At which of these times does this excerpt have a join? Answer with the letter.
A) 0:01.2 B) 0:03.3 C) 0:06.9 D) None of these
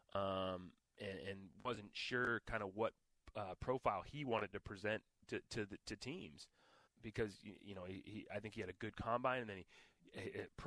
C